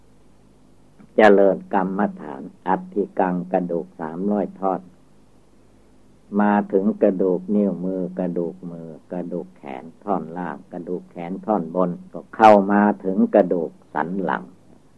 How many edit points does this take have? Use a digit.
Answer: 2